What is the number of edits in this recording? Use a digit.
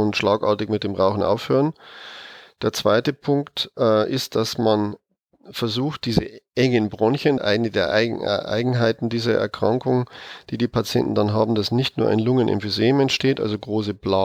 1